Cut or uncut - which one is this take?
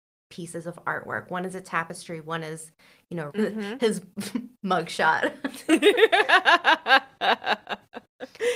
cut